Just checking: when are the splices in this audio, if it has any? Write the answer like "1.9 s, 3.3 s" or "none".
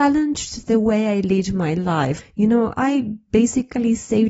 2.2 s